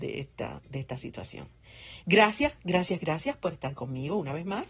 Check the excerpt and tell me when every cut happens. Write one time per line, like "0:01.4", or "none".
none